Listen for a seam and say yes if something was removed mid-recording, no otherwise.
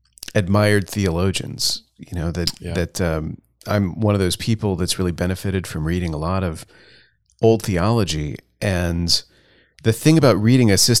no